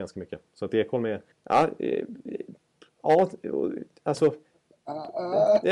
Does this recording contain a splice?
yes; 1 cut; at 1.3 s

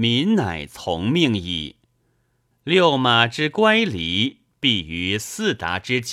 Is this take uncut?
no; 1 cut; at 2.5 s

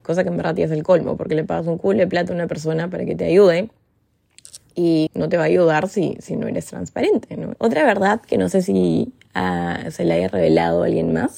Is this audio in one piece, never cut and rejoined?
no; 2 cuts; at 5.1 s, 7.5 s

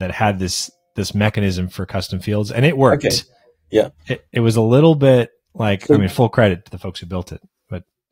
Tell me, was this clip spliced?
no; 0 cuts

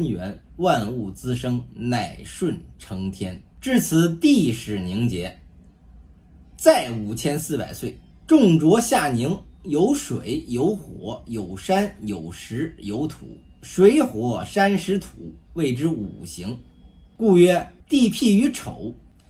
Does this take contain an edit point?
yes; 2 cuts; at 8.1 s, 17.8 s

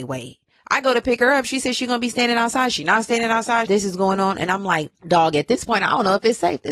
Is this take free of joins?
no; 2 cuts; at 3.7 s, 5.0 s

